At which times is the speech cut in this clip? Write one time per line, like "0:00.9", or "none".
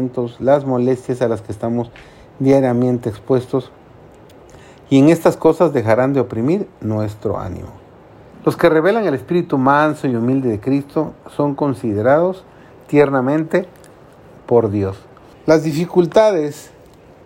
0:08.3
0:15.3